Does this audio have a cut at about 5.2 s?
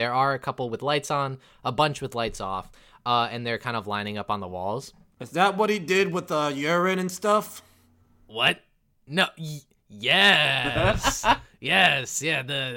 yes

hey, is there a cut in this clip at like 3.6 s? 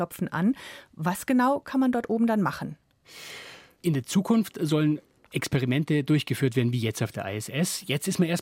no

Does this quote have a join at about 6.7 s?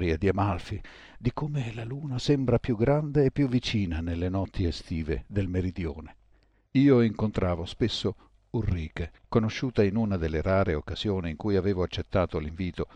yes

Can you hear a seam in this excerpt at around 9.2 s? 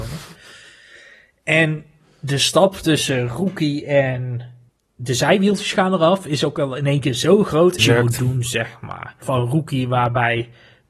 yes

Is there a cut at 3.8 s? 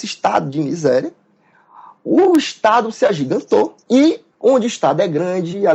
yes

